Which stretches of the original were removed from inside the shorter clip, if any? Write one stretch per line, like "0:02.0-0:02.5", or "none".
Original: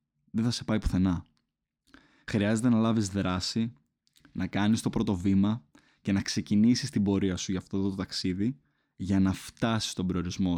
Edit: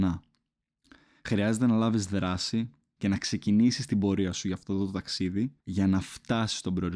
0:04.0-0:06.0
0:08.6-0:08.9

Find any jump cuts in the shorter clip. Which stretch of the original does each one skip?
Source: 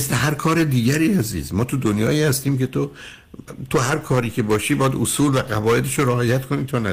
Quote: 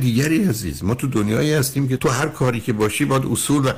0:02.7-0:03.7

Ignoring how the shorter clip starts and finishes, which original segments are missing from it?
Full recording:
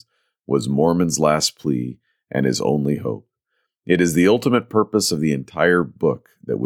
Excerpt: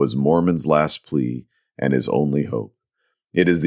none

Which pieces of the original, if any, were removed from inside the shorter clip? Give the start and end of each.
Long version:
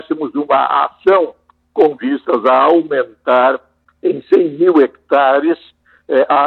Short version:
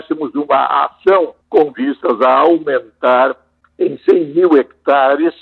0:01.4-0:01.7

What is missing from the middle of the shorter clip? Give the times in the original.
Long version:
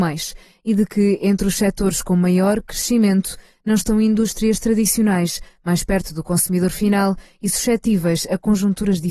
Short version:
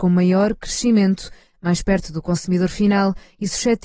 0:03.6-0:05.5

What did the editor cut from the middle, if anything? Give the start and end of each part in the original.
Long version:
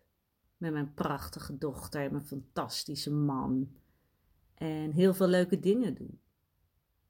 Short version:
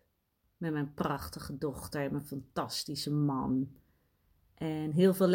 none

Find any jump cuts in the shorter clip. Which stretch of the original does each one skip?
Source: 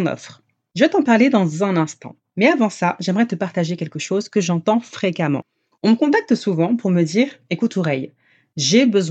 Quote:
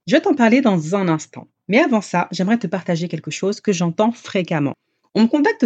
none

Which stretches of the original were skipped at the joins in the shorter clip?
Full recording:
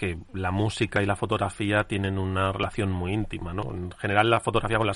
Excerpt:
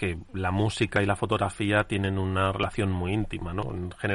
none

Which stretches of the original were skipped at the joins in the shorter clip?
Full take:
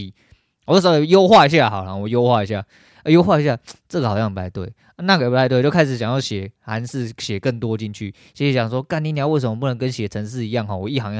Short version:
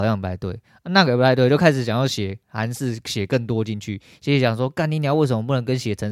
none

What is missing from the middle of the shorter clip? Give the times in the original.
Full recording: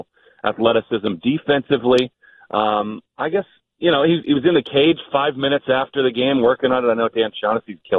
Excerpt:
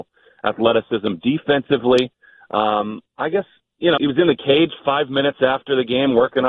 0:04.0-0:04.2

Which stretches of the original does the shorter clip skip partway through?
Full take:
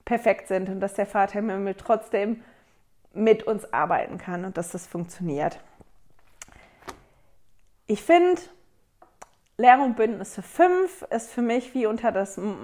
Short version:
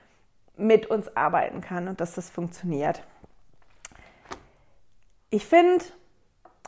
none

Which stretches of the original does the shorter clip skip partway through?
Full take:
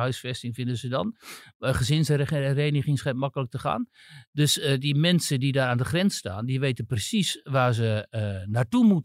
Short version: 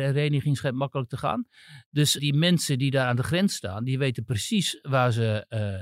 0:04.6-0:04.8

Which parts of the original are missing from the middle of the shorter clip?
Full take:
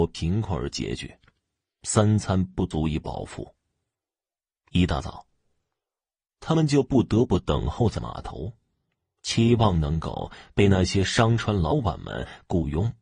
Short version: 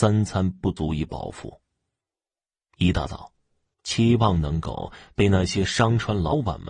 0:05.7-0:09.1

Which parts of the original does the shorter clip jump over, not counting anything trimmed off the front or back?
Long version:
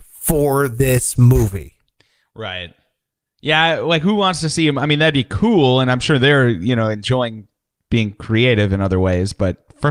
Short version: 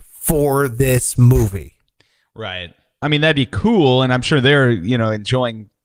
0:03.0-0:04.8

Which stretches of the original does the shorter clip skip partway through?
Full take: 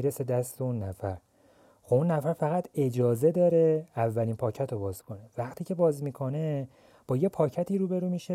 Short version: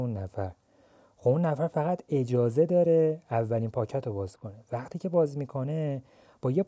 none

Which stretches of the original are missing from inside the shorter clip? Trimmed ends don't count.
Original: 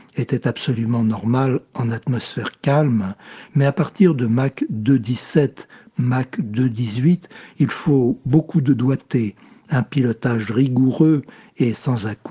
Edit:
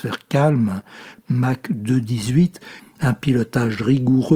0:03.5-0:05.8
0:07.5-0:09.5

